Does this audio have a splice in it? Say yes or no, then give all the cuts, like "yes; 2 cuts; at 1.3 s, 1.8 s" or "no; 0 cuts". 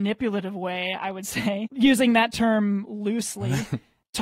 yes; 1 cut; at 1.7 s